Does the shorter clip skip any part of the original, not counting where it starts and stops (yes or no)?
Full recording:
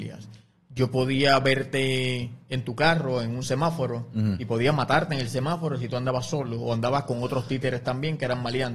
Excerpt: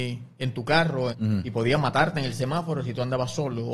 yes